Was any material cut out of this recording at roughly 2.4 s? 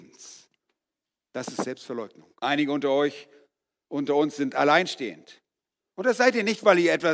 yes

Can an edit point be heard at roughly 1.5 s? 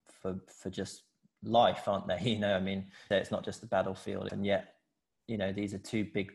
no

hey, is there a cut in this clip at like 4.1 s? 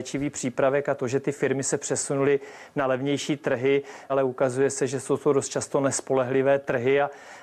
yes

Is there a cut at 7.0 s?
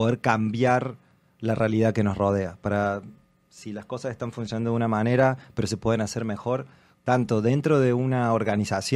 yes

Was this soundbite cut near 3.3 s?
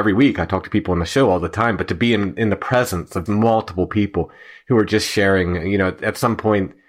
yes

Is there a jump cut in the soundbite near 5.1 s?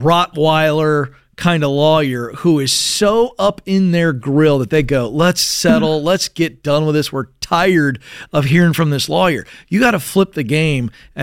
no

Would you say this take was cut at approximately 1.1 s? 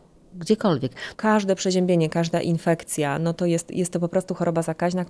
yes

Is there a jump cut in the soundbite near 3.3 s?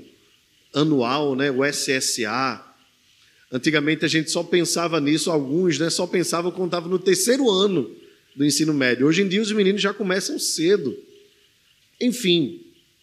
no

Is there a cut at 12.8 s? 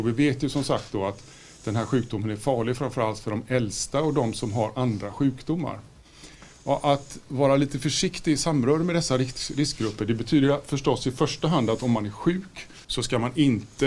yes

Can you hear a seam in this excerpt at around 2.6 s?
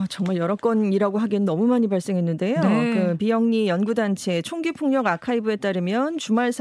no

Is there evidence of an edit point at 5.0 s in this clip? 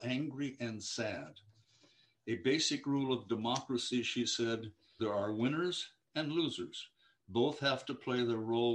yes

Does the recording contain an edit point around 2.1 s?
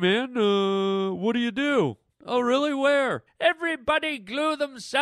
yes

